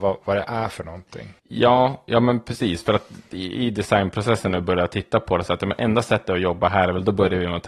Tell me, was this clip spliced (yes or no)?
yes